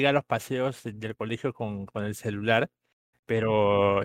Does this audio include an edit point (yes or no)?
yes